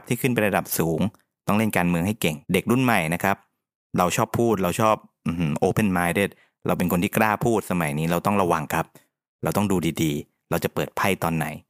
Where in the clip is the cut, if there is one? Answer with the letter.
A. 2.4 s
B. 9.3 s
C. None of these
A